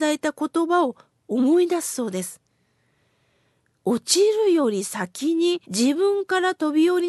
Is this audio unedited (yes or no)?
no